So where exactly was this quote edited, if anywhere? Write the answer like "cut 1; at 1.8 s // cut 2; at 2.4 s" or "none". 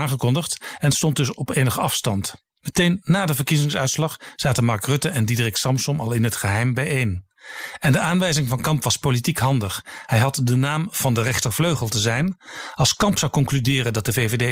cut 1; at 2.6 s

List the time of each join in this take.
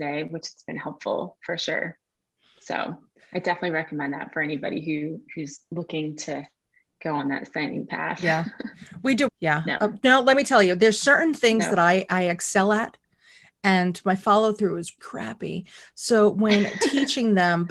cut 1; at 9.3 s // cut 2; at 15.0 s

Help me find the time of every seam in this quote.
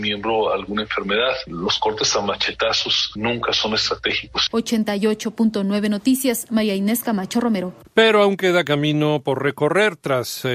none

